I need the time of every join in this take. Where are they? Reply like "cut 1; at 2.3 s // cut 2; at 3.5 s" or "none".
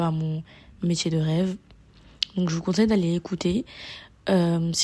none